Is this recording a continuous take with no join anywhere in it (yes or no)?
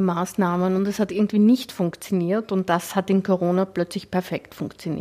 yes